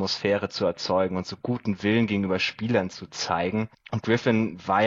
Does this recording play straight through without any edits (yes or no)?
yes